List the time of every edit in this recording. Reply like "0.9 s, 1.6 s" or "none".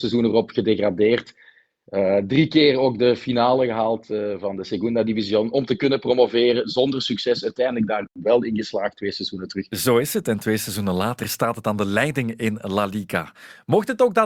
none